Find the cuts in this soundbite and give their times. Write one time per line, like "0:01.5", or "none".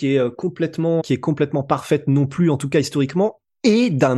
0:01.0

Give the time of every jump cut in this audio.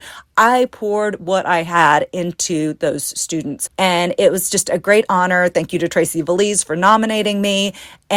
0:03.7

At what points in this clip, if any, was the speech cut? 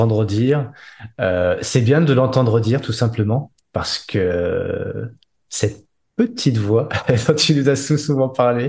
none

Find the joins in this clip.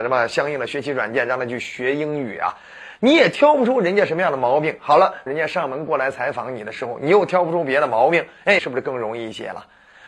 0:03.0
0:05.3
0:08.6

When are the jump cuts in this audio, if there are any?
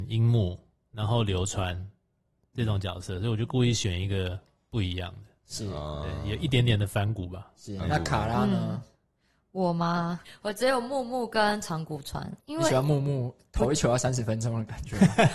0:10.2
0:12.4

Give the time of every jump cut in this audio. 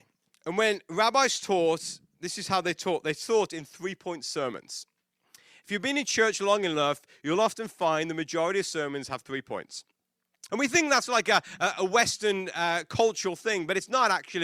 0:10.5

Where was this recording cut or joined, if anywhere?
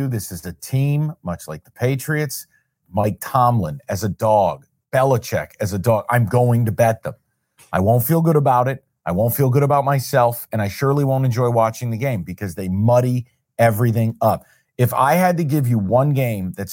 0:02.8

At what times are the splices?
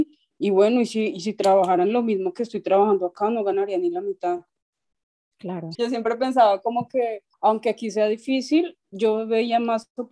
0:05.7
0:07.3

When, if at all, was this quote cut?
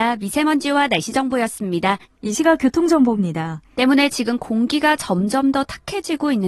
0:02.0
0:03.7

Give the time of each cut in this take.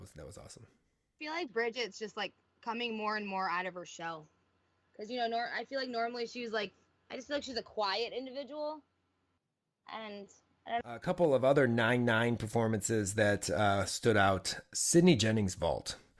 0:10.8

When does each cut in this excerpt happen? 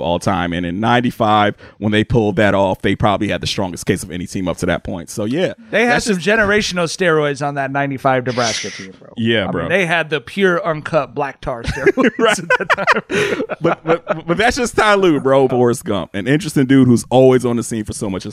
0:15.5

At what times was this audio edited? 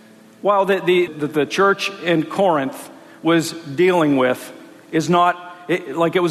0:01.1

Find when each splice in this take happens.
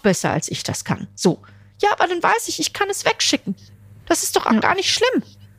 none

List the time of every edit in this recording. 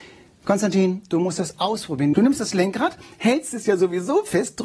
0:02.1

